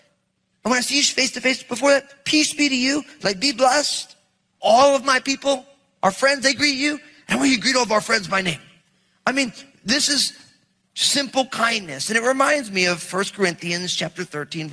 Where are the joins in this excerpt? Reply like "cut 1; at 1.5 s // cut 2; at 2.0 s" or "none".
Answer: none